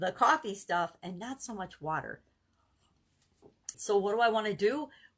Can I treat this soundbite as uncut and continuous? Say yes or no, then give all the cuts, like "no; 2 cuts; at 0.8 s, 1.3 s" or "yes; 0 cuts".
no; 1 cut; at 3.7 s